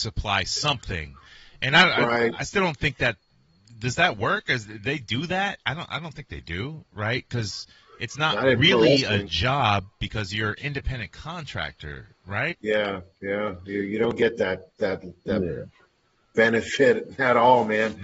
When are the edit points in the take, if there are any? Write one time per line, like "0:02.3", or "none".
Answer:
0:12.5